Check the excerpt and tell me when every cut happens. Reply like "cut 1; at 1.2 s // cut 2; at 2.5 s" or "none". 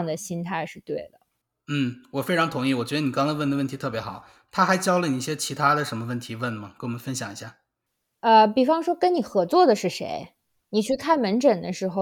none